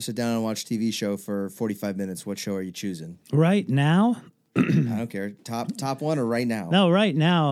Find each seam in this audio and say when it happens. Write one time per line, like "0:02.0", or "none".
none